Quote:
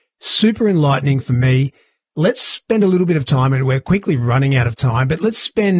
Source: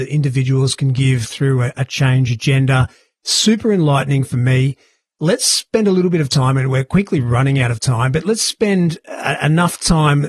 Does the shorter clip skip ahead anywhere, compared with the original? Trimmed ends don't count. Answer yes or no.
no